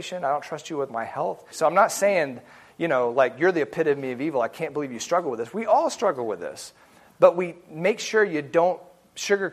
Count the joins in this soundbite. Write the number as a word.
one